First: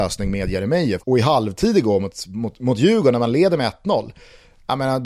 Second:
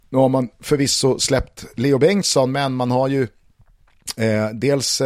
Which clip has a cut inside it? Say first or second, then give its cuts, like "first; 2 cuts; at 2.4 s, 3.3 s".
first; 1 cut; at 1.0 s